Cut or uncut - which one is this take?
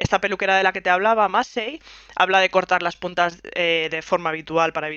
uncut